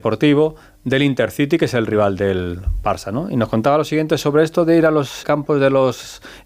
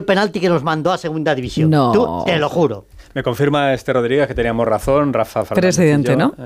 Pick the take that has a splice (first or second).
first